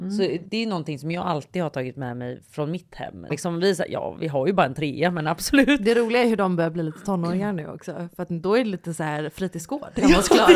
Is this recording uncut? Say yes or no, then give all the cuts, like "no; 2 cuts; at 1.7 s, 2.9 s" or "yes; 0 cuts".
no; 1 cut; at 3.3 s